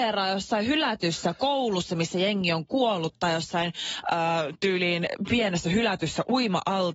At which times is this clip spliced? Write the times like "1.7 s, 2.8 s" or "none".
none